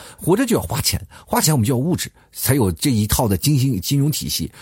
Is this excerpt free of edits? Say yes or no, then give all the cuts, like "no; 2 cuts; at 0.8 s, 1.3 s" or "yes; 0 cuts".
yes; 0 cuts